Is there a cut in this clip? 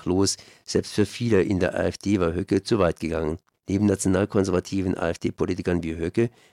yes; 1 cut; at 3.5 s

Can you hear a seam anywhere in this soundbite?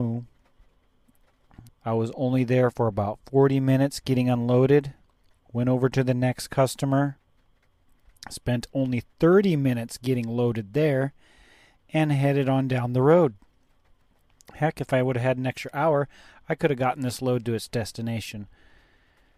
yes; 1 cut; at 1.7 s

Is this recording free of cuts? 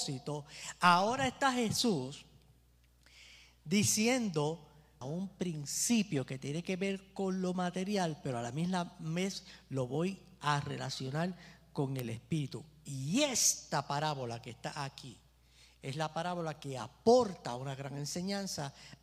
no; 1 cut; at 5.0 s

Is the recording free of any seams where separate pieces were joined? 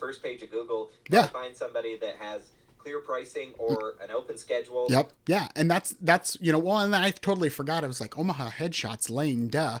no; 1 cut; at 5.2 s

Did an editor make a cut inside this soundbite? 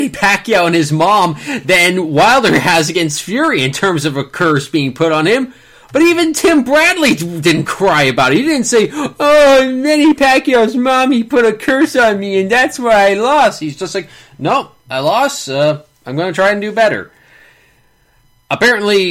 no; 0 cuts

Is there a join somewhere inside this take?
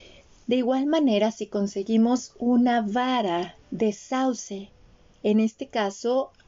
yes; 1 cut; at 3.6 s

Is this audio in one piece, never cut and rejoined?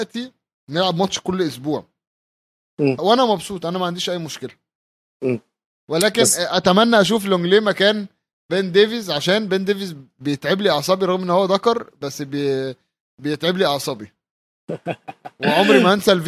no; 1 cut; at 3.0 s

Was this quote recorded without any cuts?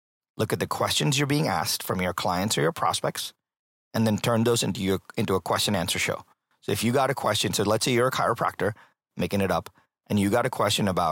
yes; 0 cuts

